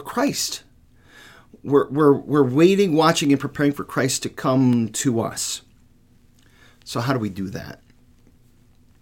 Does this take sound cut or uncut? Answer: uncut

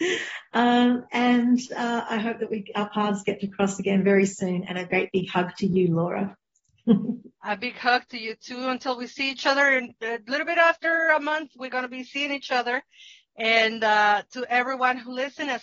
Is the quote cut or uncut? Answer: uncut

